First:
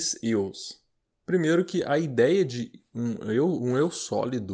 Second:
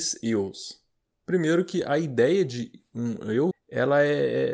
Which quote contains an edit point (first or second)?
second